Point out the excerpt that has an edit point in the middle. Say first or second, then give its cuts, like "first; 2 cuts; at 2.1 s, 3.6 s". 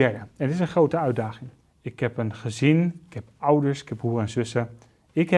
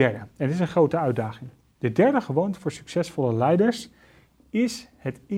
first; 1 cut; at 1.6 s